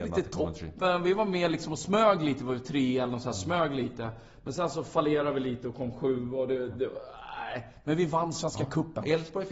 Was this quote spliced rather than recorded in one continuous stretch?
no; 0 cuts

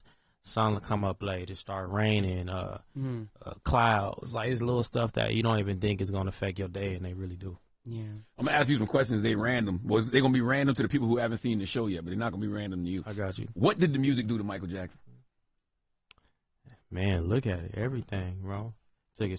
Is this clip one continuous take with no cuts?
yes; 0 cuts

